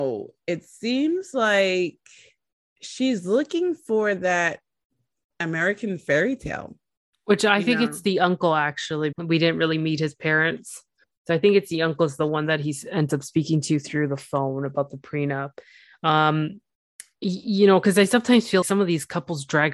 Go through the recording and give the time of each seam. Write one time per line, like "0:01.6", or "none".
0:09.1
0:18.6